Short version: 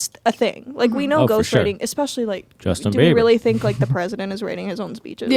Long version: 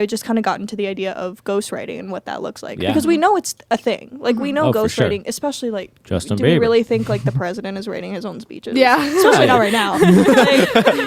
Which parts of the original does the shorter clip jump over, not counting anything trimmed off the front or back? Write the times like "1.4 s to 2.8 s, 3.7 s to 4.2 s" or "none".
none